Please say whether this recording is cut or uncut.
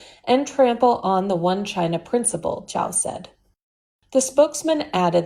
uncut